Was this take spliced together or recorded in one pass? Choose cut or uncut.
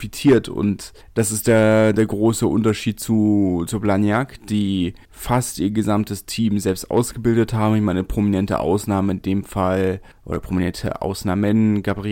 uncut